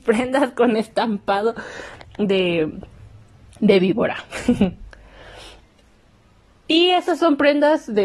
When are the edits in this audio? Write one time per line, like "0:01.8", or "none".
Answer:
none